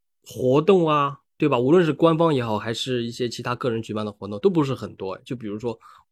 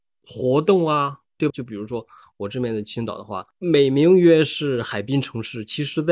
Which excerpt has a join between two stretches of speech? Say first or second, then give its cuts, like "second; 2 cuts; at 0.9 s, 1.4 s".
second; 1 cut; at 1.5 s